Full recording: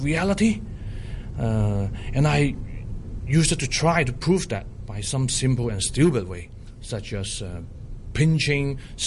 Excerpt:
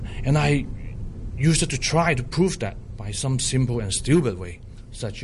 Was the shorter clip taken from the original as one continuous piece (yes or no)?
yes